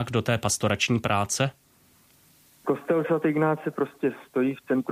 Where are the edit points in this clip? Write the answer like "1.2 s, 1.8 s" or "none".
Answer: 2.6 s